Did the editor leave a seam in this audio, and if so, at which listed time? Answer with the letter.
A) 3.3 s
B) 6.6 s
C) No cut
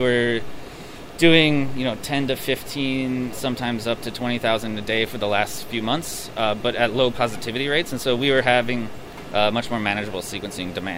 A